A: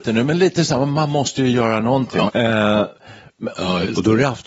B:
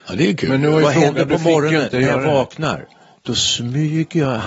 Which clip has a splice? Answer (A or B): A